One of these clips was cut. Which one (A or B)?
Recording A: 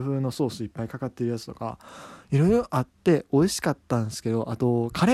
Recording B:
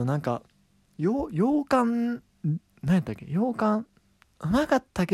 B